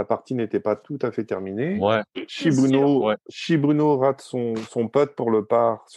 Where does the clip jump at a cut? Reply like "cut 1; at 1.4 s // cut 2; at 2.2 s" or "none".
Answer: none